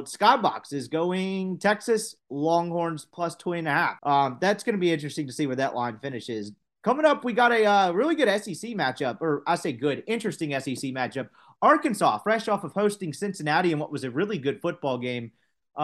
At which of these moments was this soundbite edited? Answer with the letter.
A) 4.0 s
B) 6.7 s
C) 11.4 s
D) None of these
A